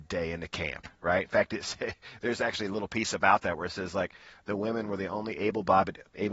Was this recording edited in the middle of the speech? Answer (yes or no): no